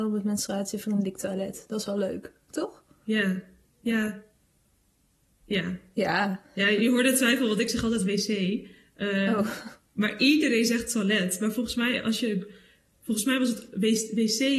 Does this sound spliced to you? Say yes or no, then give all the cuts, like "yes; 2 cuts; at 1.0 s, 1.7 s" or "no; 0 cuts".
no; 0 cuts